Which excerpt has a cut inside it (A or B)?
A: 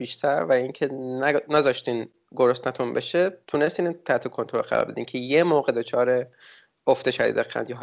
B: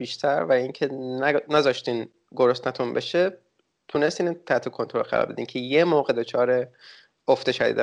A